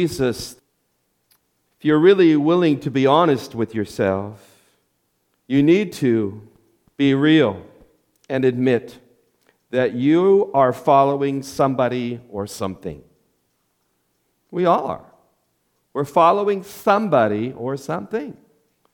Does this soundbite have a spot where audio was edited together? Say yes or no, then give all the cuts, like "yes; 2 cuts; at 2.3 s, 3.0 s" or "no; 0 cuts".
no; 0 cuts